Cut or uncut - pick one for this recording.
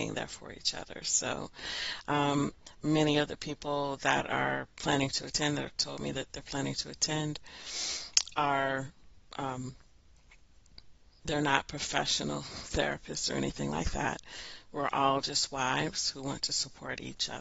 cut